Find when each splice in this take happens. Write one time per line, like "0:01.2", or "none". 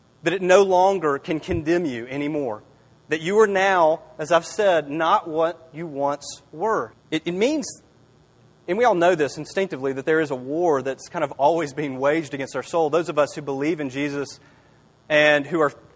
0:06.9